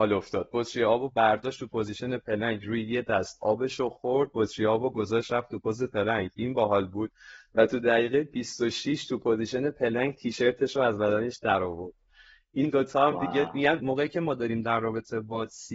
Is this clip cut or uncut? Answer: cut